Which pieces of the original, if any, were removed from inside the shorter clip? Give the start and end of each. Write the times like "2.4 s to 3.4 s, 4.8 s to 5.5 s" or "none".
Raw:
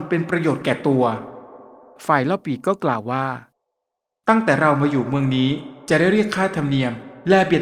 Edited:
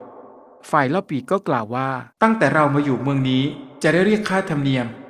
3.5 s to 4.2 s